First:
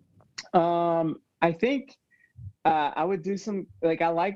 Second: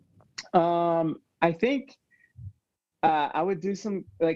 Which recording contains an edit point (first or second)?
first